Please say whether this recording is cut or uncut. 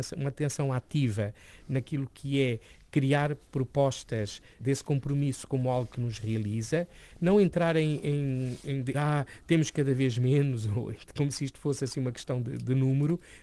cut